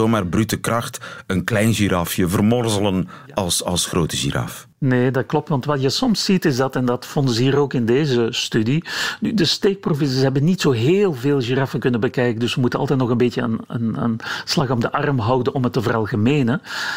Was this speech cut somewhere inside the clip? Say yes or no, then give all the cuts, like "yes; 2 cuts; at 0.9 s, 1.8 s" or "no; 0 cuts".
no; 0 cuts